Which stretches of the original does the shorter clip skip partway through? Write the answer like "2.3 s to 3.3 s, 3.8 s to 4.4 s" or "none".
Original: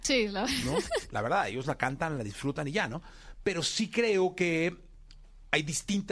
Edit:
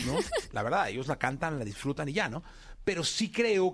none